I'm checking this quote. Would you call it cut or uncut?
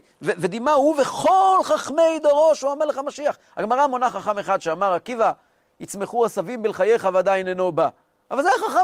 uncut